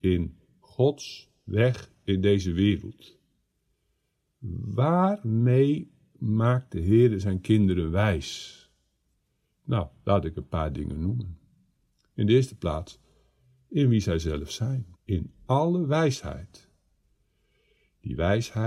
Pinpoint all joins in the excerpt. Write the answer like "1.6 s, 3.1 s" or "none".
14.9 s